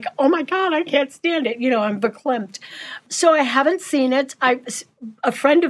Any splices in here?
no; 0 cuts

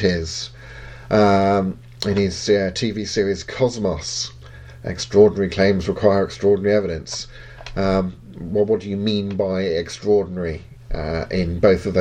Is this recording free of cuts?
yes; 0 cuts

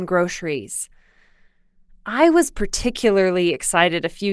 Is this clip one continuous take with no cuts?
yes; 0 cuts

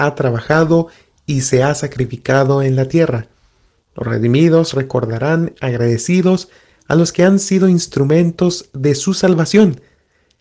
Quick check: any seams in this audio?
no; 0 cuts

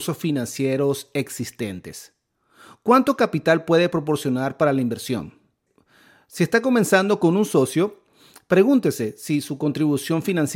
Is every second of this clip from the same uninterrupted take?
yes; 0 cuts

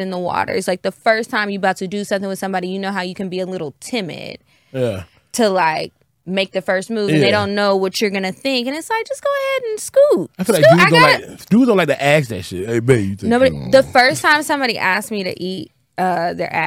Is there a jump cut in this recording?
no; 0 cuts

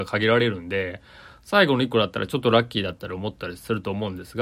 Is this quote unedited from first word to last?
yes; 0 cuts

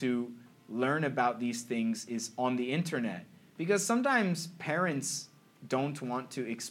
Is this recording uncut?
no; 1 cut; at 3.5 s

